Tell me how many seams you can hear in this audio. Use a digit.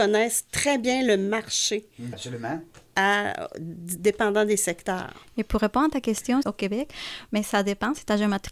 2